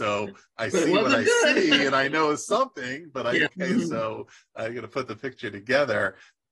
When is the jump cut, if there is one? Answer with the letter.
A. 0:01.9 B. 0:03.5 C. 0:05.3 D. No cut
B